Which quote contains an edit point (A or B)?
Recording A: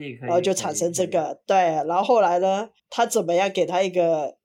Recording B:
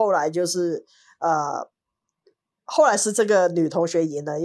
A